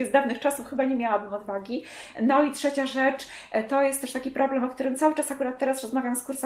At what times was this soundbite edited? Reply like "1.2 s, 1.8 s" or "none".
none